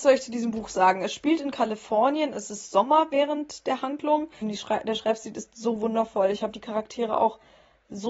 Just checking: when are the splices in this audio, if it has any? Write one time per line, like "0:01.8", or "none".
0:04.4